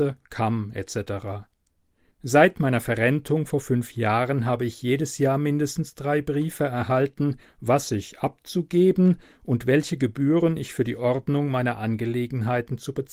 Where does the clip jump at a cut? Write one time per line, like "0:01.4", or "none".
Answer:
0:02.1
0:07.4